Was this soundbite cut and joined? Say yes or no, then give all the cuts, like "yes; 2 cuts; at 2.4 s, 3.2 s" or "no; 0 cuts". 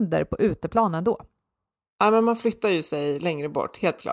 no; 0 cuts